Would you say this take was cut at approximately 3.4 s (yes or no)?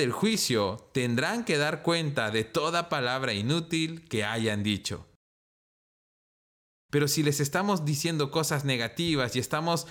no